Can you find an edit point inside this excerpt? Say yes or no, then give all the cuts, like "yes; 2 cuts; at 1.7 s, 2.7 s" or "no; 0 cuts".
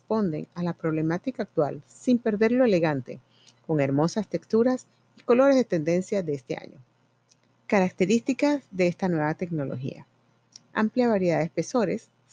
yes; 1 cut; at 7.5 s